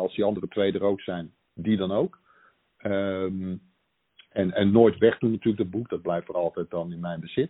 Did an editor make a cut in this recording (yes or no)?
no